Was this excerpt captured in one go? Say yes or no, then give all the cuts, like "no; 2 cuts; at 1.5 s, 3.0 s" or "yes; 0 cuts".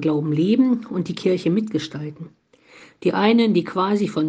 yes; 0 cuts